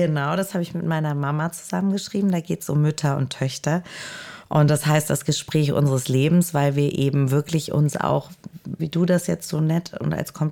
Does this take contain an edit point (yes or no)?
yes